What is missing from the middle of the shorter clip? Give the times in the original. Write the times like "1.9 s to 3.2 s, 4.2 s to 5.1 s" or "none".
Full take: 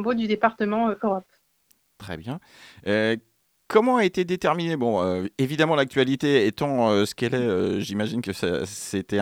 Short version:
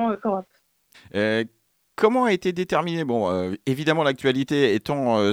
1.7 s to 2.7 s